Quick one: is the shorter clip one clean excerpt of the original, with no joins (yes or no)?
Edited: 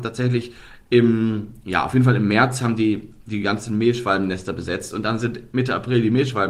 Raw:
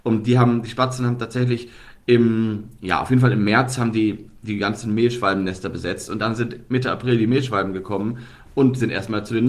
yes